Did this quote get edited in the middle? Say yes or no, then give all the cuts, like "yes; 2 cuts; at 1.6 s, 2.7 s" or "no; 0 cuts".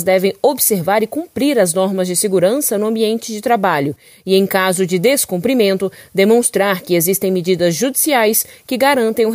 no; 0 cuts